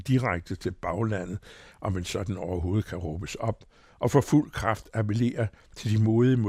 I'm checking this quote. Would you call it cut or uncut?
uncut